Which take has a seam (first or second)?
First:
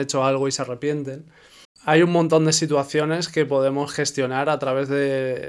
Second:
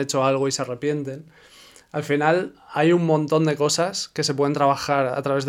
first